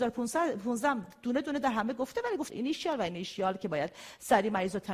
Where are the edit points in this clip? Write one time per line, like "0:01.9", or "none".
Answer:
0:02.5

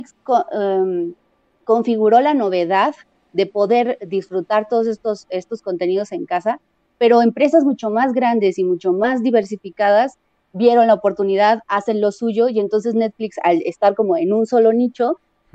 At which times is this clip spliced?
none

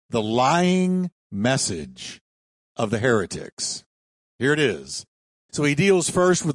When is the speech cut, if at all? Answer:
0:05.5

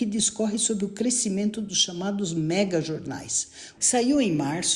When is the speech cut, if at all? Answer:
0:03.8

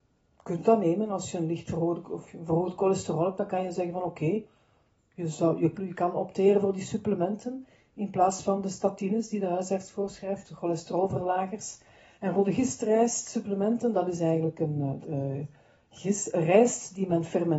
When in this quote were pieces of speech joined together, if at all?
0:05.7
0:12.2
0:15.0

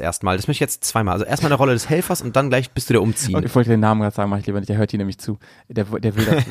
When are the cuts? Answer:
0:03.4

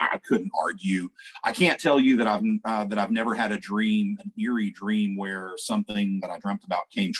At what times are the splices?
none

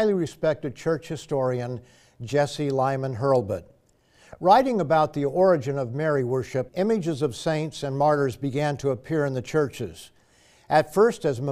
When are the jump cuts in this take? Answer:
0:06.7

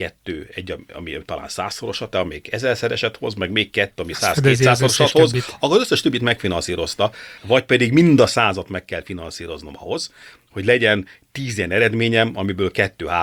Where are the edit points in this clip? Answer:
0:02.1
0:07.4

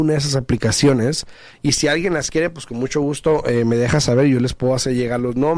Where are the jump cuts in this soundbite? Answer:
none

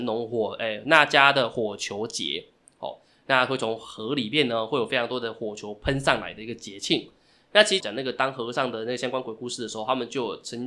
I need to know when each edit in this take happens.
0:07.8

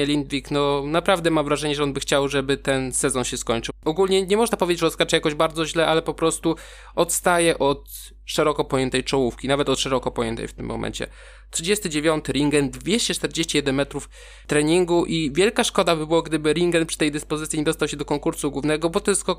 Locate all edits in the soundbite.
0:03.7

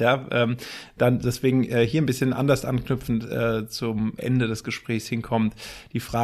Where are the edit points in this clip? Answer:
0:04.2

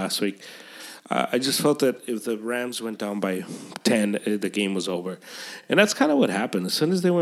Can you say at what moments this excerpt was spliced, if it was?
none

